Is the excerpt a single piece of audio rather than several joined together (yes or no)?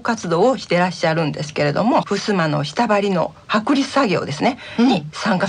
no